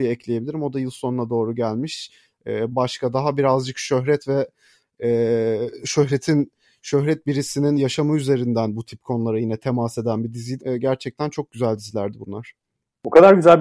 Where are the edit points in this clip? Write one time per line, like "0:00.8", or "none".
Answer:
0:02.7
0:10.6

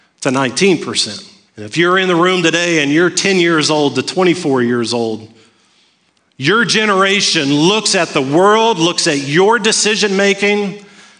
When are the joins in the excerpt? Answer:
0:01.5

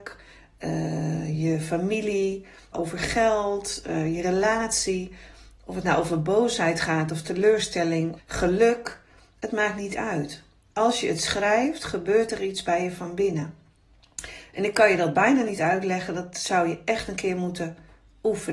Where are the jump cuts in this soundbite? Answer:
0:02.7
0:08.2

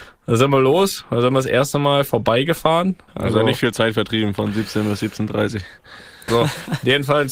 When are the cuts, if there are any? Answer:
0:03.1
0:06.3

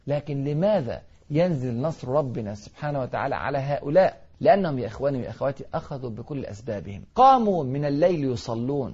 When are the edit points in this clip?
0:04.3
0:07.1

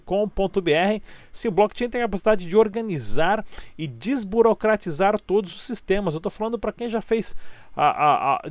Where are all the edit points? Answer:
none

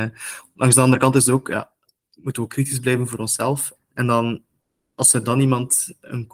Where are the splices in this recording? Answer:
0:03.8

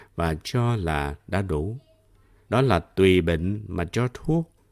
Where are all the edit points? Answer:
0:02.5

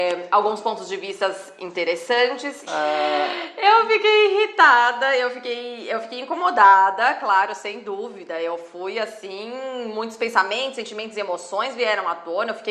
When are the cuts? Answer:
0:02.7

